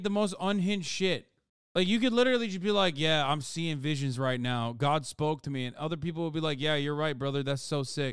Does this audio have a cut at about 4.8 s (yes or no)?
no